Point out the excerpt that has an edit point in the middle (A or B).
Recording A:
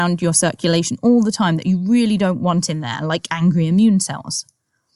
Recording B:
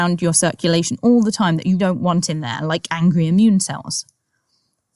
B